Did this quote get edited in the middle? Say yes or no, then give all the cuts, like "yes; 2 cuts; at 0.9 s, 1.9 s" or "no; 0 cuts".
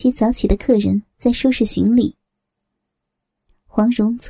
no; 0 cuts